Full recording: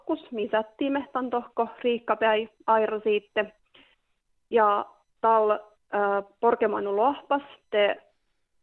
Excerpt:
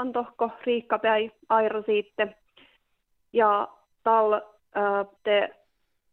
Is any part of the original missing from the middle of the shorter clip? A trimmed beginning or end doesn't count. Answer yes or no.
yes